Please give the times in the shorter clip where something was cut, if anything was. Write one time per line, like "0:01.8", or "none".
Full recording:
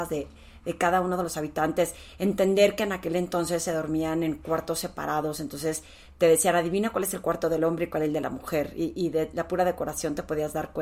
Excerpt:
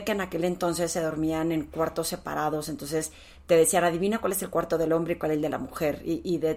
none